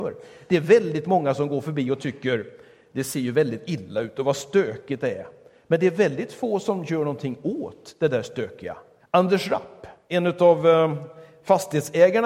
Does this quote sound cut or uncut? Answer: cut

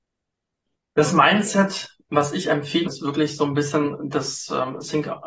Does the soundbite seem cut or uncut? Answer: cut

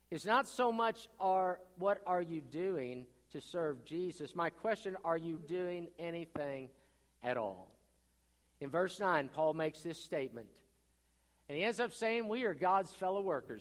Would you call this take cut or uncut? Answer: cut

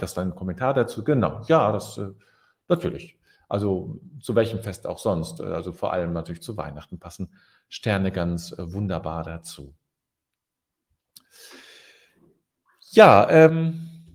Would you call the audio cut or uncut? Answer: uncut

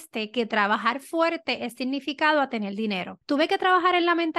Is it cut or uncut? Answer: cut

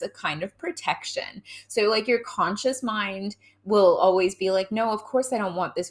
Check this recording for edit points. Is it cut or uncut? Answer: uncut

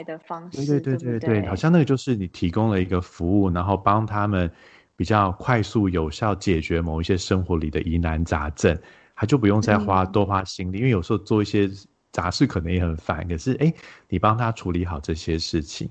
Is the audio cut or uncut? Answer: uncut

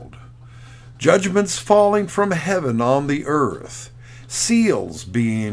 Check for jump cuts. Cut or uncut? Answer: cut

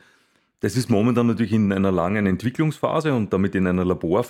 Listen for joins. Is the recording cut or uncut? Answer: uncut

